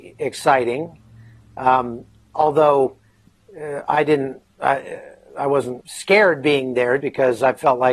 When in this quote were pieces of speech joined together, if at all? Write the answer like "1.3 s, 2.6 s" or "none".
5.8 s, 7.0 s